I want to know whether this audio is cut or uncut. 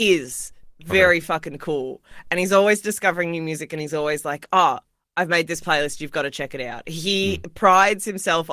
uncut